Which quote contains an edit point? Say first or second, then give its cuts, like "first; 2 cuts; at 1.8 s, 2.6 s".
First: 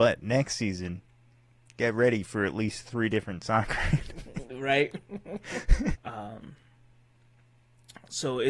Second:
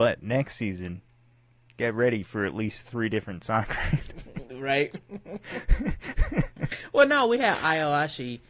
first; 1 cut; at 6.0 s